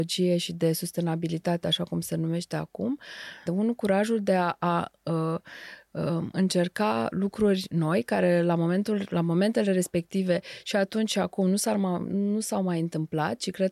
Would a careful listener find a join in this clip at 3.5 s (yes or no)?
yes